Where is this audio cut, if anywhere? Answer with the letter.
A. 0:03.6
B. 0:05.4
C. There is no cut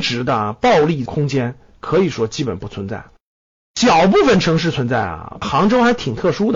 B